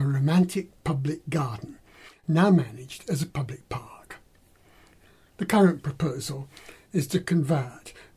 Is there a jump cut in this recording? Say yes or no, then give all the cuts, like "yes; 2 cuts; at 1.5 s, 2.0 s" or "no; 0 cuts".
no; 0 cuts